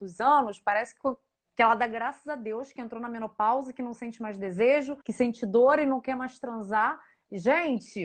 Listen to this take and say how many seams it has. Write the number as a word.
one